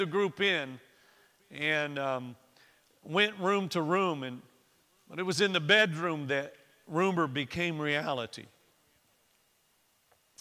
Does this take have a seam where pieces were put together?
no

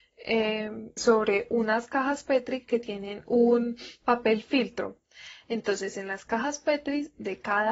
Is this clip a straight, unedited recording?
no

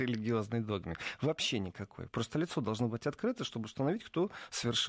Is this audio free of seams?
yes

